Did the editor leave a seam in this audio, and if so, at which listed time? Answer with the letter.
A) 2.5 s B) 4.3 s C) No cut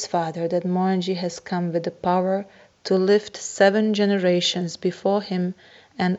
C